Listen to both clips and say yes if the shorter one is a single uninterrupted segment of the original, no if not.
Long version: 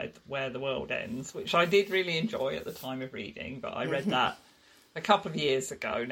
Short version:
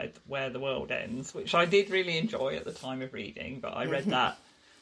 yes